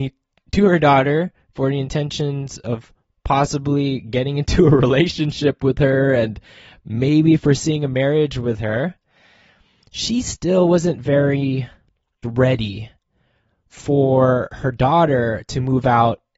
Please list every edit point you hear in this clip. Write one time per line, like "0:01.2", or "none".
0:12.2